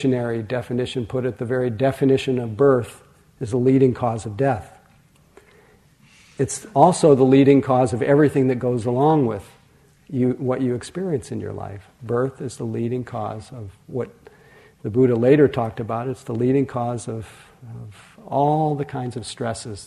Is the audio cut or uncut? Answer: uncut